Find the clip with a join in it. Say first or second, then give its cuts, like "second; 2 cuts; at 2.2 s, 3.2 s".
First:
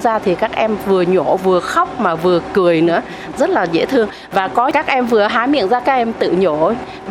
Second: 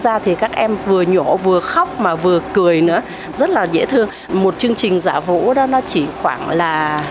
second; 1 cut; at 4.3 s